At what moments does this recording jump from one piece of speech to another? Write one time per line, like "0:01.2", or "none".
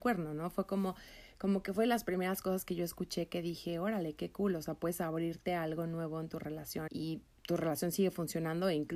0:06.9

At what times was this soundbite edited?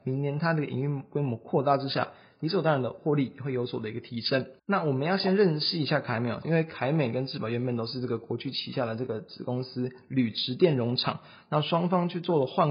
0:04.6
0:06.4

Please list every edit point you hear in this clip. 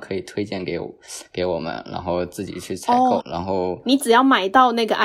0:03.2

